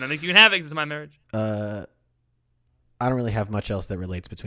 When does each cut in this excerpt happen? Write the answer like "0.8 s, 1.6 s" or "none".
1.2 s

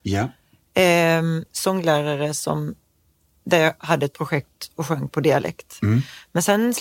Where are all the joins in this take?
1.5 s

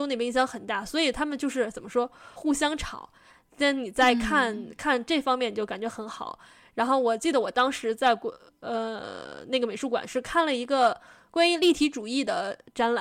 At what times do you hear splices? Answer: 2.4 s

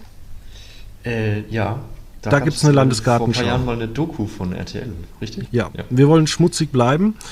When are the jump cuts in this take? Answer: 5.5 s

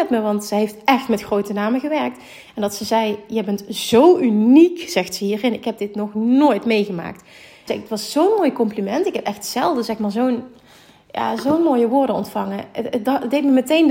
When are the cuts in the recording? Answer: 7.7 s

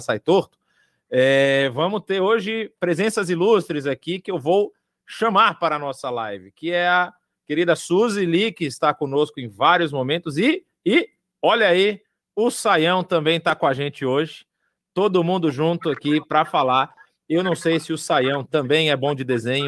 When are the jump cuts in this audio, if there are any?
none

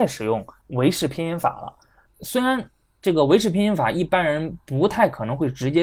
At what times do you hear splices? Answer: 2.1 s

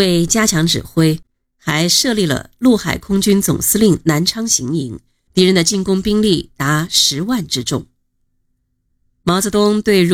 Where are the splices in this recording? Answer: 5.3 s

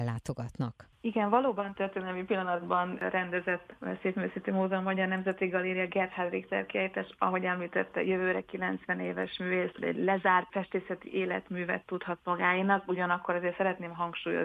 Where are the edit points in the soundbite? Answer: none

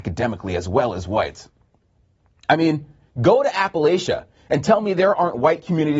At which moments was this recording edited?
3.1 s

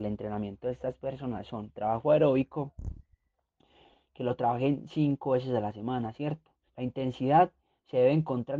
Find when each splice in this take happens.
6.7 s

